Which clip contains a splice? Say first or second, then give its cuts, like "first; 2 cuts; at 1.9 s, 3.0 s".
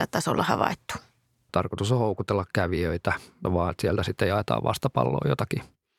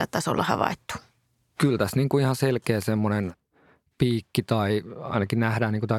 first; 2 cuts; at 1.5 s, 3.4 s